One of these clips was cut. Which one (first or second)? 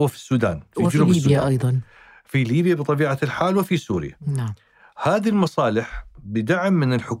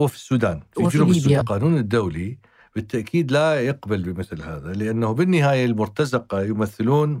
second